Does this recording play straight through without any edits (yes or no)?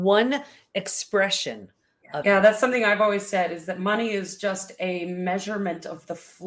no